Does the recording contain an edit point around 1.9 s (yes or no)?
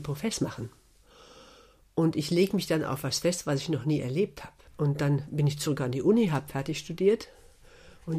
no